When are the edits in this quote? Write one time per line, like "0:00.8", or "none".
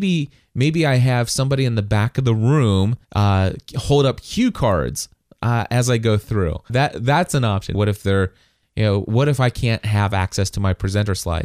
0:03.0
0:06.7
0:07.7

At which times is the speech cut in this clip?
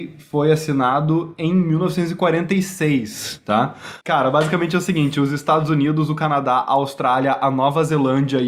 0:04.0

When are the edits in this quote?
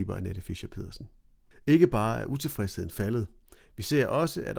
0:01.5

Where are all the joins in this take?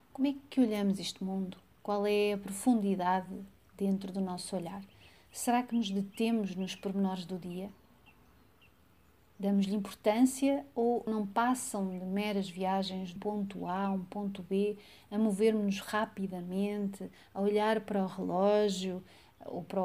0:11.1
0:13.2

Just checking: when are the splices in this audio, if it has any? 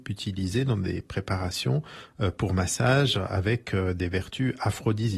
none

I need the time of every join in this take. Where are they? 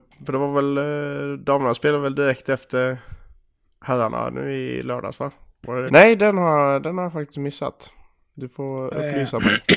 0:05.9

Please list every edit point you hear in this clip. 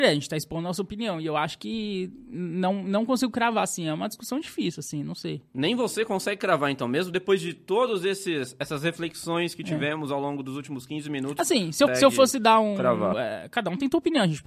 0:11.9
0:13.1

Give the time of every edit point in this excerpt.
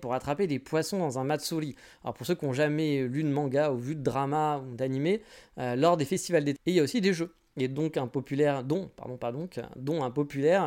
0:06.6

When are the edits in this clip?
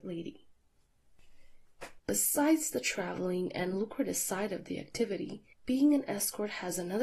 0:02.0
0:05.5

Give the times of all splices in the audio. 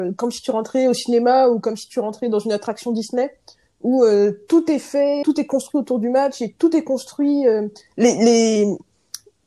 0:05.2

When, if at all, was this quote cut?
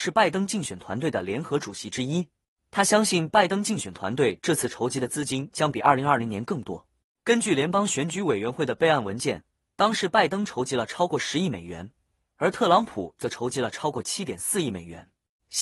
none

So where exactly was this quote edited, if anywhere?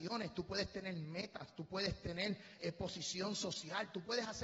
0:02.6

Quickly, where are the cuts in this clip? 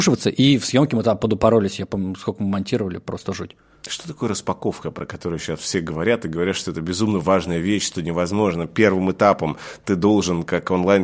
none

